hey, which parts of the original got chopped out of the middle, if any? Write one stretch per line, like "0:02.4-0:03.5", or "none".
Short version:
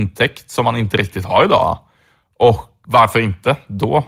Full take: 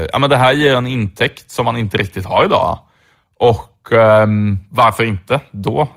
0:03.9-0:04.7